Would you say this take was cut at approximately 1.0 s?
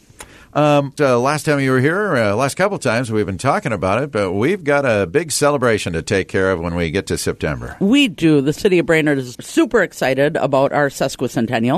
yes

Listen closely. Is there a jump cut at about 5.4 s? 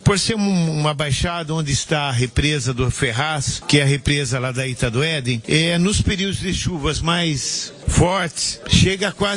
yes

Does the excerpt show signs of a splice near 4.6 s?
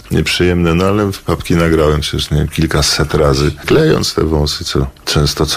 no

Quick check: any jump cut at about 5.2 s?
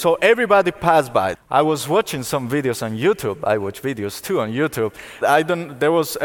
yes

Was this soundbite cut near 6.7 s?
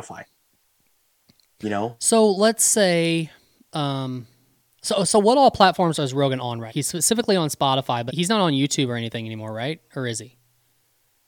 yes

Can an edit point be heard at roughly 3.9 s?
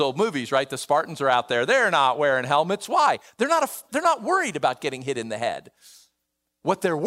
yes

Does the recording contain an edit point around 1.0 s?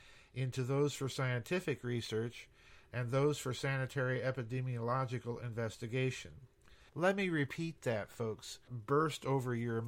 no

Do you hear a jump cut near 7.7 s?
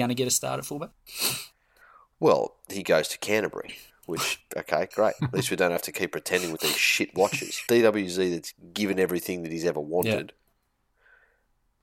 yes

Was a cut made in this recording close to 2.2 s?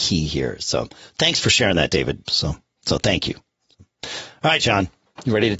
yes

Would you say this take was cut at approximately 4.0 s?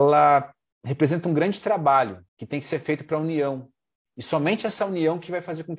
no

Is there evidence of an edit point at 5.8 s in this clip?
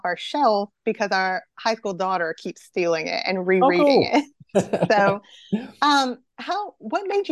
no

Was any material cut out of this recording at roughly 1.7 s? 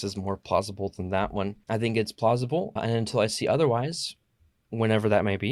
yes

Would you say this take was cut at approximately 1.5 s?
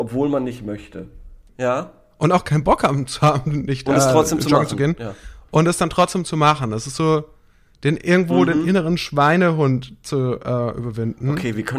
yes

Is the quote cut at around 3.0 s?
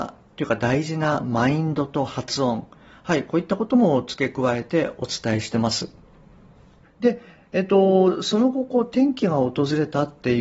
no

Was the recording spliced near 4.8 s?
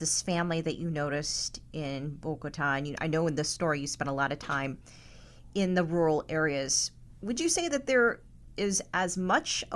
no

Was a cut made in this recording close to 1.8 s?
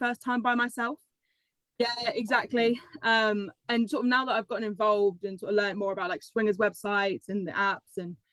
yes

